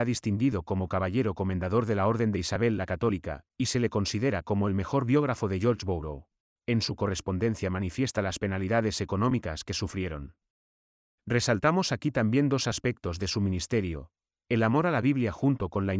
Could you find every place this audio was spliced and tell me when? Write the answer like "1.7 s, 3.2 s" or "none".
6.6 s